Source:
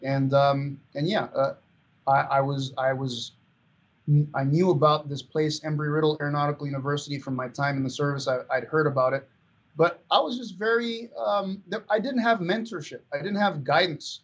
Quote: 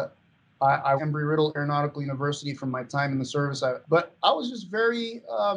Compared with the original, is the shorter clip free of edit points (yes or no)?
no